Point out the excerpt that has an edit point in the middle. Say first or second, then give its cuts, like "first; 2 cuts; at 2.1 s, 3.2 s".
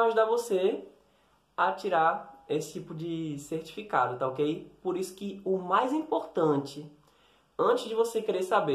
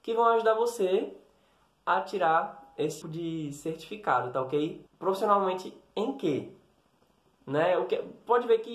second; 2 cuts; at 3.0 s, 4.9 s